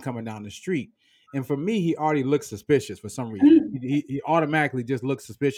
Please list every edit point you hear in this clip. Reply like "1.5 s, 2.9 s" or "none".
none